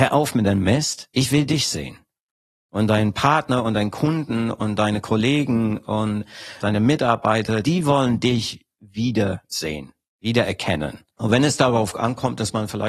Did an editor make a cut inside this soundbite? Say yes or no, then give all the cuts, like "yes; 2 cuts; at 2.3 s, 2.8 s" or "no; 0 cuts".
yes; 1 cut; at 7.6 s